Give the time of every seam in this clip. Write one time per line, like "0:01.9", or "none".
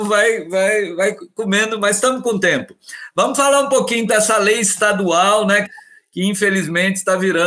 0:04.1
0:05.6